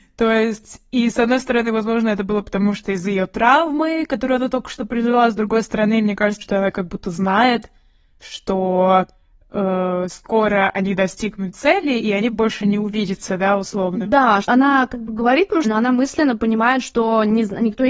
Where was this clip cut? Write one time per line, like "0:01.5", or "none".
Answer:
0:06.4
0:14.4
0:15.6